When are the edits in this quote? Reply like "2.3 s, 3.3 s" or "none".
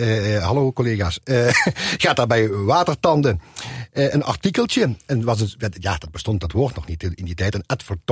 none